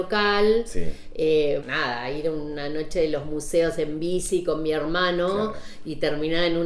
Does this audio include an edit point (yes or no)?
yes